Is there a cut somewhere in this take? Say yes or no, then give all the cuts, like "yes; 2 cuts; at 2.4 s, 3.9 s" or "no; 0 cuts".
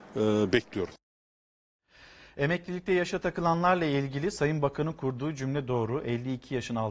no; 0 cuts